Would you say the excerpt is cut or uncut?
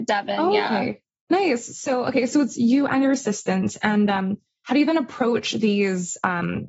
uncut